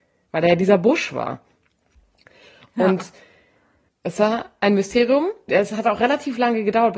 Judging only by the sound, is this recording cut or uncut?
cut